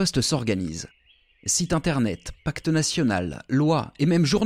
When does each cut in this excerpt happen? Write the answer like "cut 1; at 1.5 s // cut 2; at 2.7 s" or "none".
none